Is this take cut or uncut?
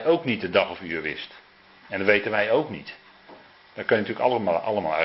cut